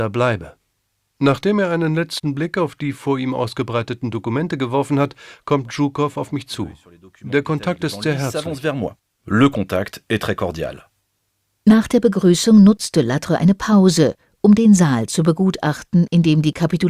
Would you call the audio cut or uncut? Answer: uncut